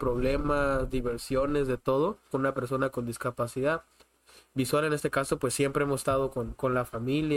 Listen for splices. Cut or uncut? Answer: cut